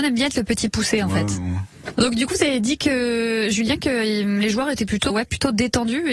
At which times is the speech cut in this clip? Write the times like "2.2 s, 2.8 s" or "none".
1.9 s, 5.1 s